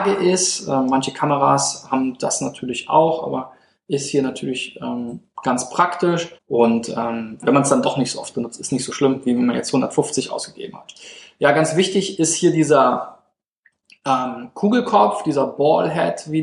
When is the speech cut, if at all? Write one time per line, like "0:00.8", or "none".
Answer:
0:06.4
0:07.4